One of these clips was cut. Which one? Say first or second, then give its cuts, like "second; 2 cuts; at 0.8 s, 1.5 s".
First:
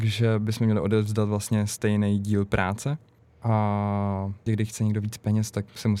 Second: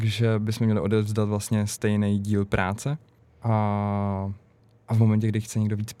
first; 1 cut; at 4.5 s